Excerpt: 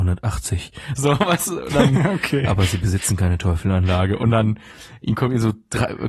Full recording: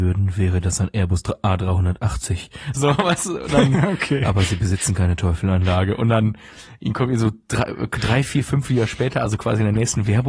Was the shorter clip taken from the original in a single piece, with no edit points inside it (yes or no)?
yes